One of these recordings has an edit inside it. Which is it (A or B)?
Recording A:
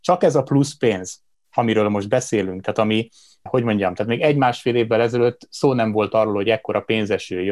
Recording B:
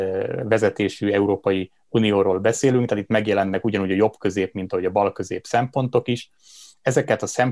A